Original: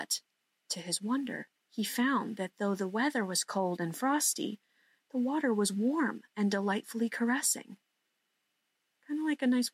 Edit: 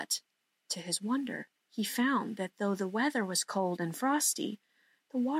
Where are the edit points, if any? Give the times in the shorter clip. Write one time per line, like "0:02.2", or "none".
none

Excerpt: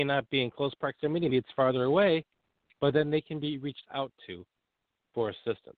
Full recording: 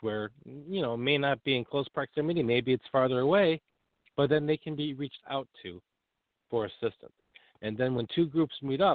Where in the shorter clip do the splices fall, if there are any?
0:01.3

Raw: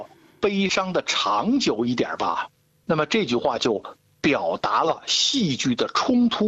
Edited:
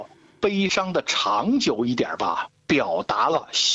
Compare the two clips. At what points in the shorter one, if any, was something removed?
0:02.6

